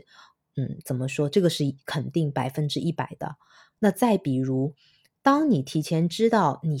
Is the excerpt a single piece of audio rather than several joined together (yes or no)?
yes